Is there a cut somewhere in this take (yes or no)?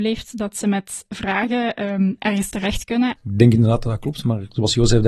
yes